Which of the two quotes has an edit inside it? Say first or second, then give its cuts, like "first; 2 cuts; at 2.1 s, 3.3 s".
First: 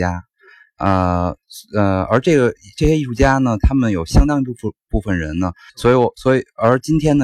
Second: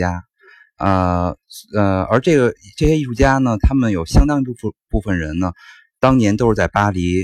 first; 1 cut; at 5.7 s